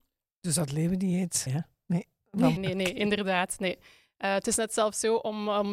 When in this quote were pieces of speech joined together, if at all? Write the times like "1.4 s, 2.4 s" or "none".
1.5 s, 2.6 s